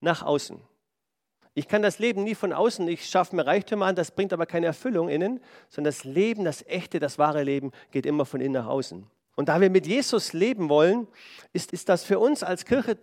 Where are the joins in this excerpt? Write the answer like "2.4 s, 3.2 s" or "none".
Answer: 9.3 s, 11.7 s